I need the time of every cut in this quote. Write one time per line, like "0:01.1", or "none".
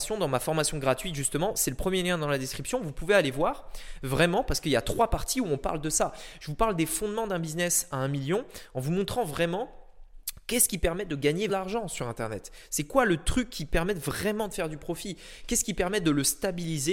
0:11.5